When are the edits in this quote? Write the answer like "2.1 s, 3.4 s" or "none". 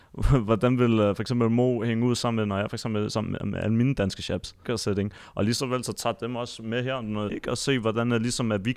4.6 s, 7.3 s